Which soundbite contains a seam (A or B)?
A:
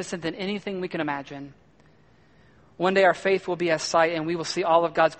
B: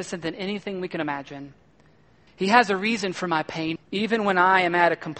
B